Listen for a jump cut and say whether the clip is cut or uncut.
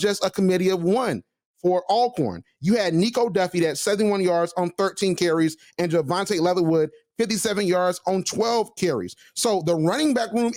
uncut